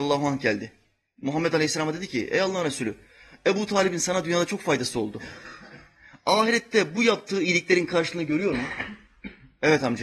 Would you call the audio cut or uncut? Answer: uncut